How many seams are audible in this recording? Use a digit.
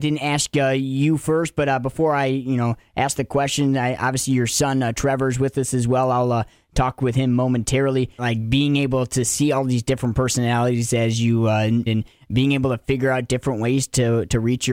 2